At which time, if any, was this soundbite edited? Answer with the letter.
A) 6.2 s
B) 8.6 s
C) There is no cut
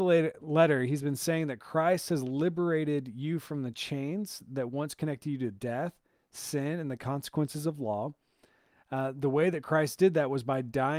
C